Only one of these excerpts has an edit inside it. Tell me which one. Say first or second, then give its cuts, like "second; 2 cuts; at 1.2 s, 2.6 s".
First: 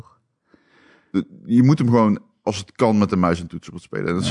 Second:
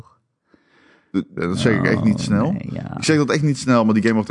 second; 1 cut; at 1.4 s